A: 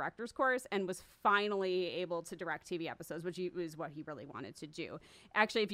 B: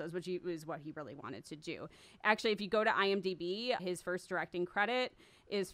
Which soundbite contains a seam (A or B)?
B